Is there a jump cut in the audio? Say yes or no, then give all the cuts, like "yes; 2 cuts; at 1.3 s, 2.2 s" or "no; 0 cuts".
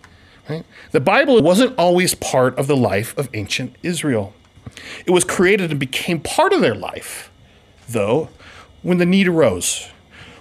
yes; 1 cut; at 1.4 s